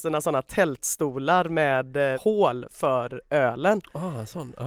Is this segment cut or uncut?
cut